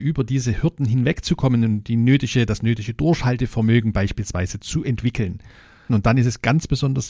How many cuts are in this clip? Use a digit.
1